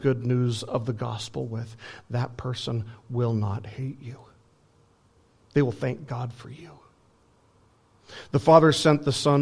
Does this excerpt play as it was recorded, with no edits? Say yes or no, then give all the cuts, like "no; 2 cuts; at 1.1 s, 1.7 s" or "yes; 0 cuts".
yes; 0 cuts